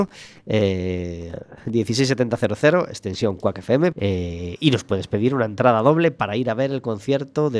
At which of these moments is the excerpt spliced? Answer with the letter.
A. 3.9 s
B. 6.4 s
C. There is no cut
A